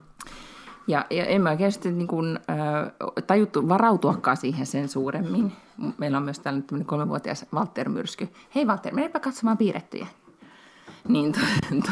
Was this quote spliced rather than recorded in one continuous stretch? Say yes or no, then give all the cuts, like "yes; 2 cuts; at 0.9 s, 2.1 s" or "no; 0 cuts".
no; 0 cuts